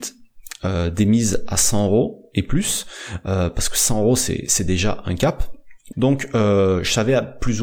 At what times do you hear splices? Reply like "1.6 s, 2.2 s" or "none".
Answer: 5.9 s